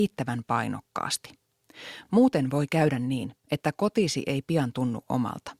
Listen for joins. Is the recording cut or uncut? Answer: uncut